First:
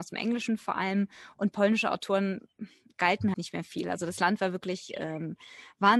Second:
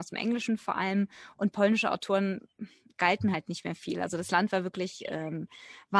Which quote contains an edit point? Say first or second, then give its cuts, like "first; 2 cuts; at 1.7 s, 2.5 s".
first; 1 cut; at 3.3 s